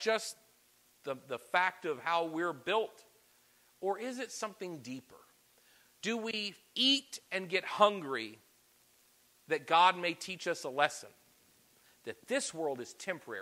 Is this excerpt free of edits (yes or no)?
yes